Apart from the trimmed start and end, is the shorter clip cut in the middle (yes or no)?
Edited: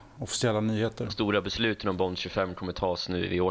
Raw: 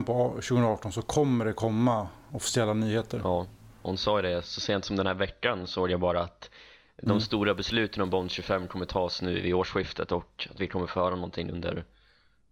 yes